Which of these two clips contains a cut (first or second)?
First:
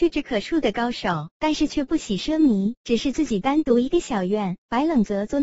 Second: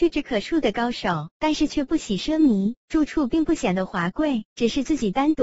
first